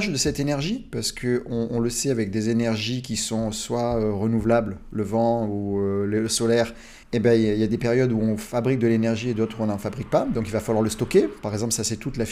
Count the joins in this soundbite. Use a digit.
1